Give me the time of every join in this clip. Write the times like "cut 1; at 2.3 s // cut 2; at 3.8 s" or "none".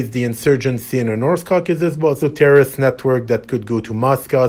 cut 1; at 2.2 s